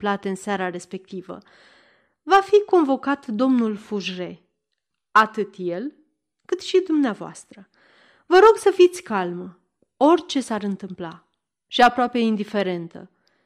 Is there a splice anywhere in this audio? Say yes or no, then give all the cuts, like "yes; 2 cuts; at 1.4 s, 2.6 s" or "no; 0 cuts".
no; 0 cuts